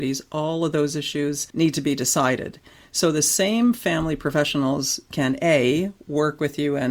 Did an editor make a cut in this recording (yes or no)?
yes